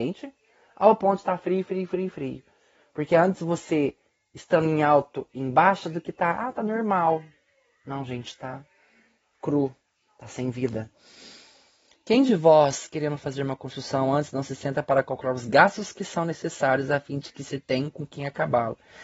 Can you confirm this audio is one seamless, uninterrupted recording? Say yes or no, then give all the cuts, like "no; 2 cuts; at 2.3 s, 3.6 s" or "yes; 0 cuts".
yes; 0 cuts